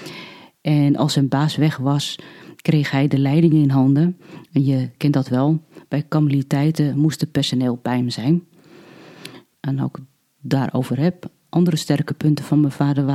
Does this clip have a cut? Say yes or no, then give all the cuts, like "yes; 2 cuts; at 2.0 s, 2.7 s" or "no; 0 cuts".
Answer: yes; 1 cut; at 9.5 s